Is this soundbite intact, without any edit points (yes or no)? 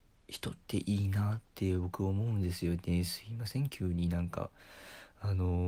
yes